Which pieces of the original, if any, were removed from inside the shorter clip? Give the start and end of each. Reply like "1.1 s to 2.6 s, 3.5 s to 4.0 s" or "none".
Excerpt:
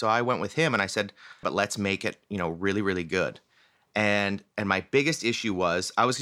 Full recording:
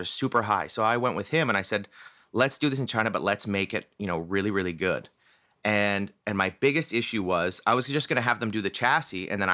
2.2 s to 3.1 s

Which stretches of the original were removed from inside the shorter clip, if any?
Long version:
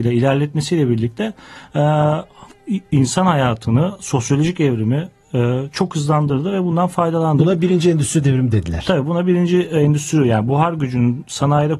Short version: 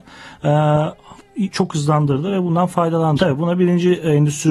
2.8 s to 5.7 s, 7.4 s to 8.8 s

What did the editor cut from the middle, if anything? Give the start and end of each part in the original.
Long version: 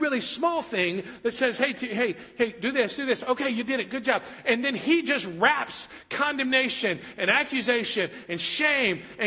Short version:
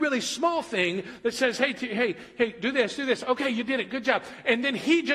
none

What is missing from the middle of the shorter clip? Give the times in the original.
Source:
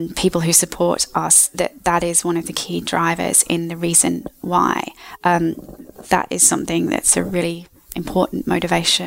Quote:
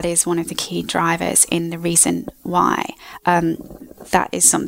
none

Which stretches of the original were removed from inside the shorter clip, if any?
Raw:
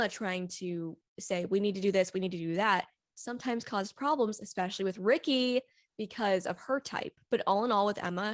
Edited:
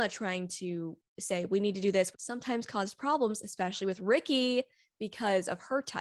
2.1 s to 3.1 s

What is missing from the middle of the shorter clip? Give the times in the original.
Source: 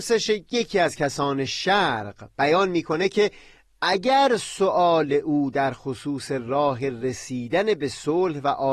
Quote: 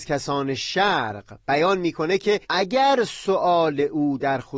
3.3 s to 3.8 s

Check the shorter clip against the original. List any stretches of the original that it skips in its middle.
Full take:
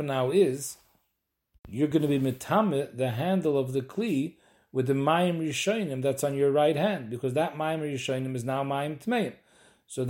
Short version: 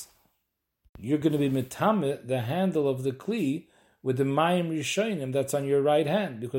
none

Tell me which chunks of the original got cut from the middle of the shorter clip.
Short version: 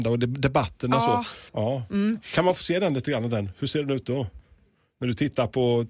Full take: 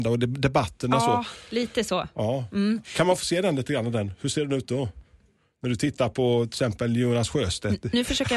1.5 s to 2.1 s

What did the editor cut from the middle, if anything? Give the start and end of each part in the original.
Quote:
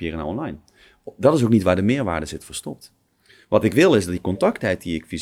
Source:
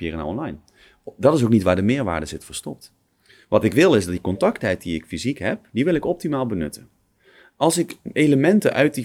none

